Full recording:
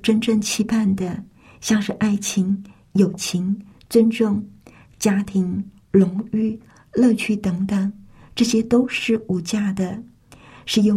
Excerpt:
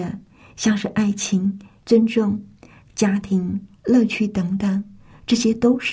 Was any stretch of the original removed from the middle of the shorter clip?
yes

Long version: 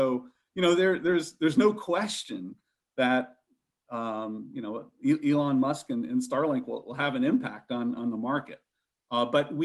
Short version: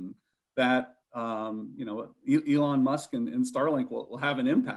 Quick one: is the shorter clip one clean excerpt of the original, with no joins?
no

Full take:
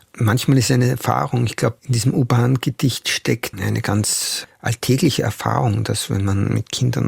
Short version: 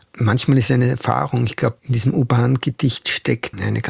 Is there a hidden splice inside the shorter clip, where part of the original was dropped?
no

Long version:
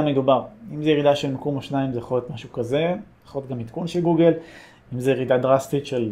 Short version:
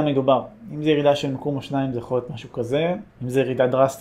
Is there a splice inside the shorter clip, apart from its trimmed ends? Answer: yes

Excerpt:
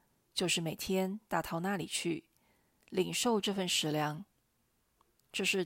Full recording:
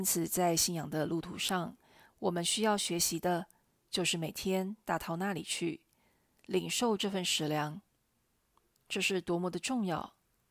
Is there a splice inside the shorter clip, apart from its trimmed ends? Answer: no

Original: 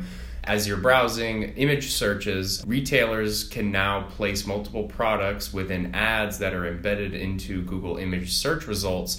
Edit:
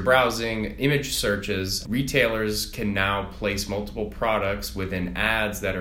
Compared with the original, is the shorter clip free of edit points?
yes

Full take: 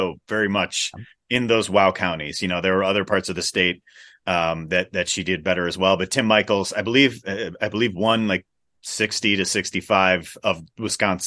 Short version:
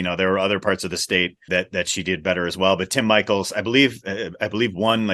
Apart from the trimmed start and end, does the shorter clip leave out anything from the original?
yes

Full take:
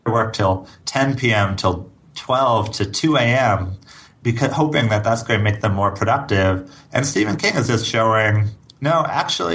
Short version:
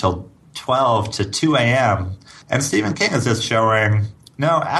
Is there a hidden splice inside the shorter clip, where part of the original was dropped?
yes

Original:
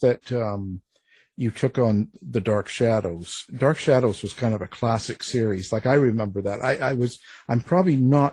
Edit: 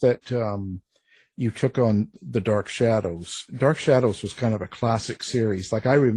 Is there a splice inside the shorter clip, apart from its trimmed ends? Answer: no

